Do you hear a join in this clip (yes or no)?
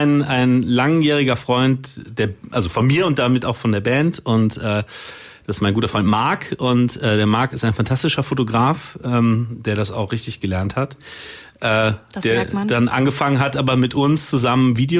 no